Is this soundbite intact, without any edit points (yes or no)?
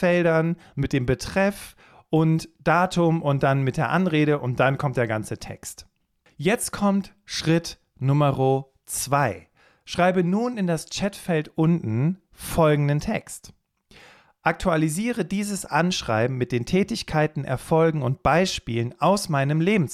yes